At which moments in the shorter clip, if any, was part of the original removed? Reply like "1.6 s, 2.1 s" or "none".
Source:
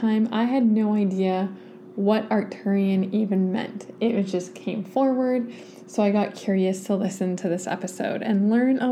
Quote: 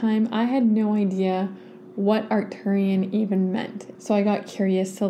4.0 s